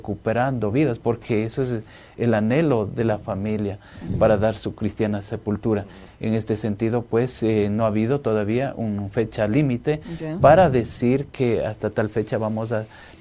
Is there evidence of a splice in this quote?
yes; 1 cut; at 2.2 s

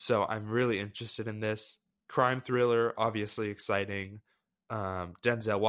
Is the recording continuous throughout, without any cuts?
yes; 0 cuts

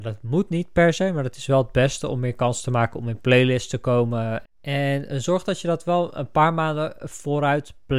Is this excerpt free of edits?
no; 1 cut; at 4.4 s

